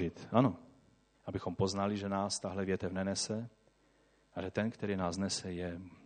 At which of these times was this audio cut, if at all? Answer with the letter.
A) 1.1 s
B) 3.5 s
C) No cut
A